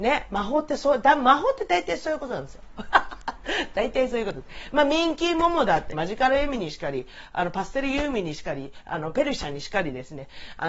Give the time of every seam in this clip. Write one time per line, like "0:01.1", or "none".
0:05.9